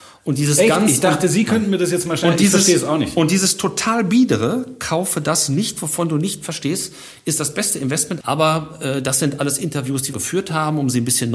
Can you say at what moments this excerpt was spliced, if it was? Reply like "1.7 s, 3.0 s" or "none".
8.2 s, 10.1 s